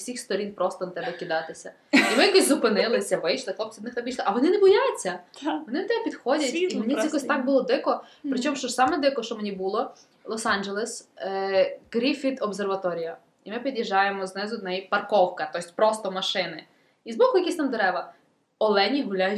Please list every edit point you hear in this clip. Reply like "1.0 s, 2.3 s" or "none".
none

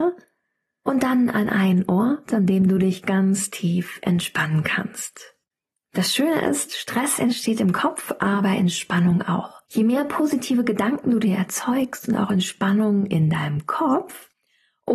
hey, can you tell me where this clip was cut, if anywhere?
9.7 s

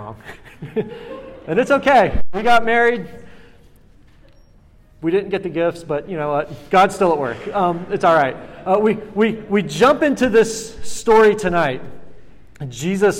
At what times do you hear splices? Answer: none

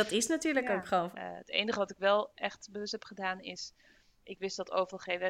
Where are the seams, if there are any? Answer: 1.1 s

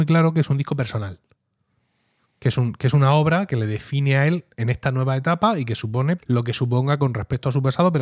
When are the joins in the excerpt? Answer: 6.2 s

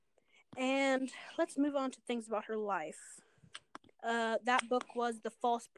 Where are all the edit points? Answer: 3.9 s

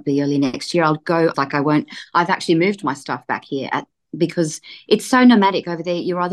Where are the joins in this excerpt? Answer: 1.3 s

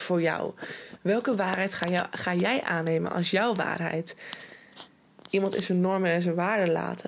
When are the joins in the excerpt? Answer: 5.3 s

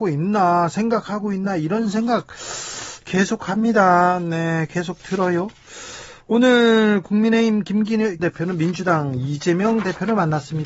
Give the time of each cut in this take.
8.2 s

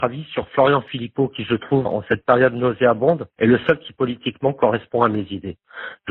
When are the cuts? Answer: 1.8 s, 3.3 s

